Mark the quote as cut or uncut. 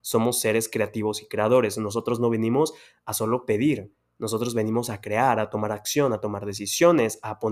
uncut